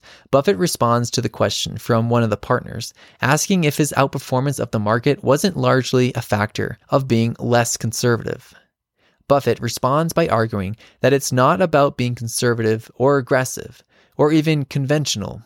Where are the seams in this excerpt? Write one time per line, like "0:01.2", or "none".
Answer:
none